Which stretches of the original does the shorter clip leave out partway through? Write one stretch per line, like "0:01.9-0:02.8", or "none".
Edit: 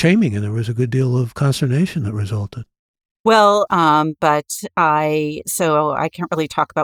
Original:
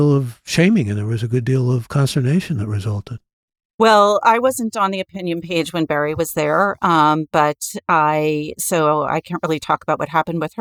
0:04.2-0:06.8